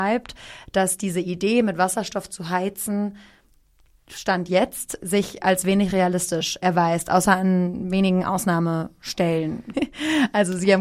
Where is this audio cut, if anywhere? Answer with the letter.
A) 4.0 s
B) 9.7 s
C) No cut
B